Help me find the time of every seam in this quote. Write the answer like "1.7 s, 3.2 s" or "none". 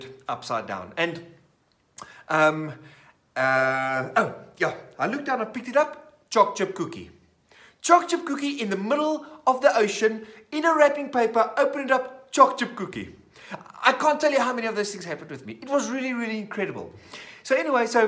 4.9 s